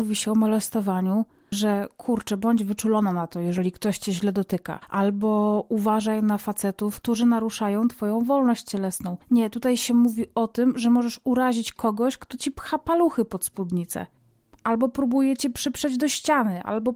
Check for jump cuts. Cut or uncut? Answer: cut